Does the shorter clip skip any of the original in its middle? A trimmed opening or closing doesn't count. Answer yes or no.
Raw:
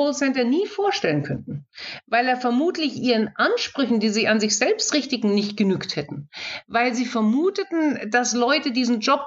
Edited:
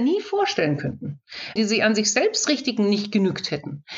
yes